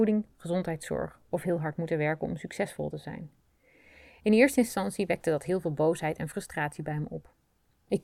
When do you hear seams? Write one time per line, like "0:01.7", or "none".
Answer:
none